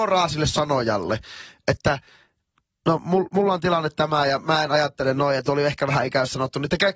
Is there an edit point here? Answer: no; 0 cuts

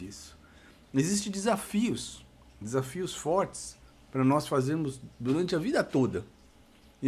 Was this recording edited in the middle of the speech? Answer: no; 0 cuts

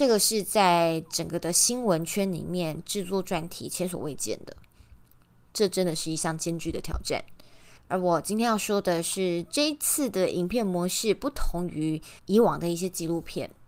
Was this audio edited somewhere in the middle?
yes; 2 cuts; at 7.8 s, 12.2 s

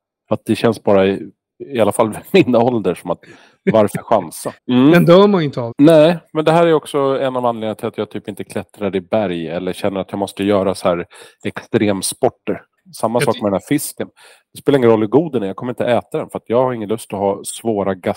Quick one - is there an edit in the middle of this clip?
yes; 3 cuts; at 4.6 s, 5.7 s, 12.8 s

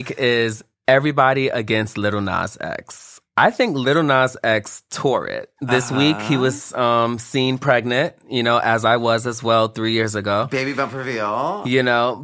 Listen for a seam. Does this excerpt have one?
no; 0 cuts

